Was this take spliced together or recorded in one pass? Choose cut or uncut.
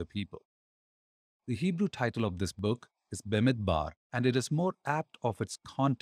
cut